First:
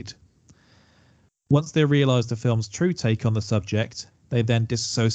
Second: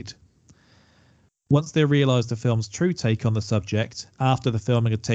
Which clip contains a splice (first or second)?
first